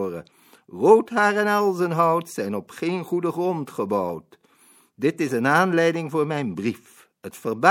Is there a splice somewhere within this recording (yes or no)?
no